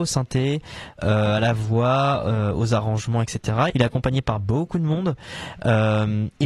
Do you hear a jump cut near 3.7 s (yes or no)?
yes